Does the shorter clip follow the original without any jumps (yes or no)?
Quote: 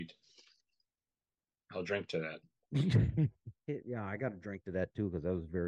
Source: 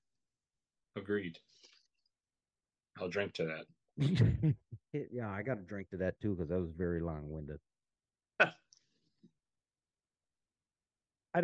yes